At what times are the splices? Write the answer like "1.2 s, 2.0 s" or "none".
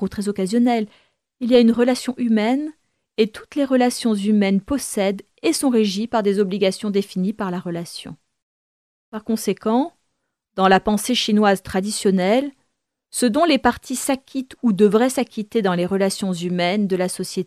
none